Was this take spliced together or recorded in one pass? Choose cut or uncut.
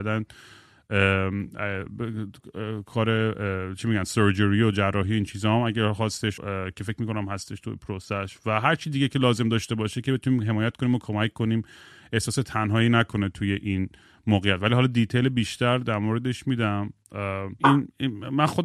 cut